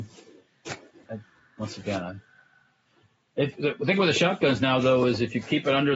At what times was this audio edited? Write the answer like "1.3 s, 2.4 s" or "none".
1.0 s